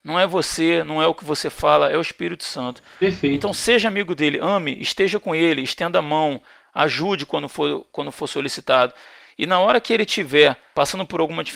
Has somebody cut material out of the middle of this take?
no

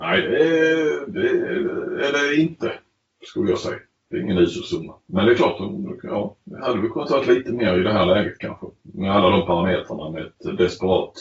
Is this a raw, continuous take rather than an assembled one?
yes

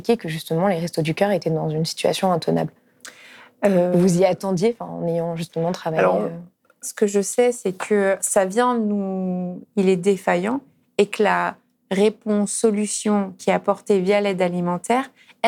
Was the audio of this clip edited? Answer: yes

